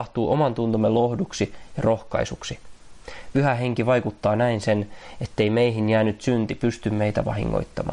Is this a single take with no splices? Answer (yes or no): yes